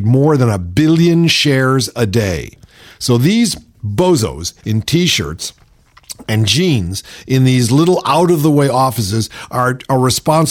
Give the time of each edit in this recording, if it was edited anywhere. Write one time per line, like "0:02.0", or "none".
none